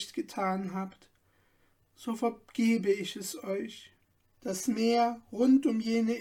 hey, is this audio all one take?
no; 1 cut; at 4.3 s

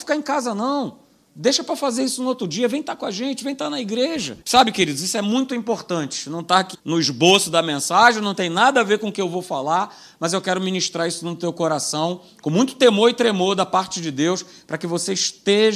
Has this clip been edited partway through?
yes; 2 cuts; at 4.4 s, 6.7 s

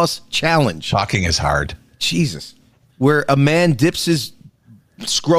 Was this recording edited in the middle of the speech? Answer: yes; 1 cut; at 2.9 s

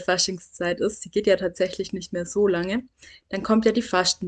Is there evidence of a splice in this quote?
no; 0 cuts

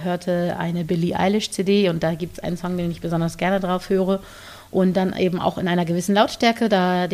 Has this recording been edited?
no; 0 cuts

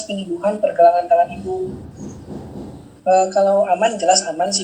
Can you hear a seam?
yes; 1 cut; at 3.0 s

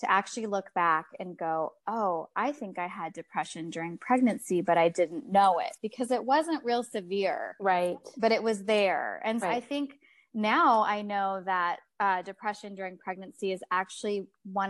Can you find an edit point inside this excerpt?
yes; 1 cut; at 9.4 s

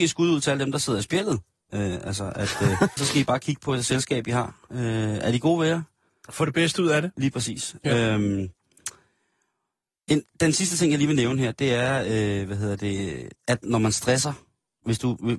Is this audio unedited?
no; 1 cut; at 3.0 s

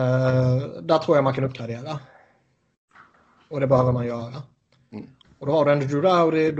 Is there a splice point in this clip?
no; 0 cuts

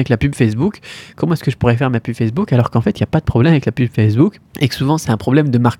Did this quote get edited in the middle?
yes; 1 cut; at 4.5 s

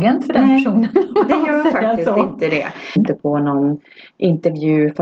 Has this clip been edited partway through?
yes; 1 cut; at 3.0 s

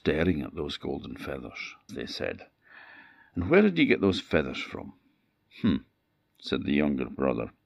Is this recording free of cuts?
no; 1 cut; at 1.9 s

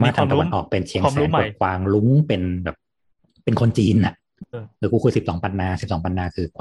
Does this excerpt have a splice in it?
yes; 1 cut; at 4.5 s

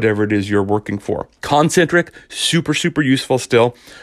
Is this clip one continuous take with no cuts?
no; 1 cut; at 1.4 s

